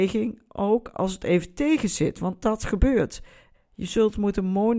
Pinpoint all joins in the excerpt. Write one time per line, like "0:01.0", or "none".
0:03.5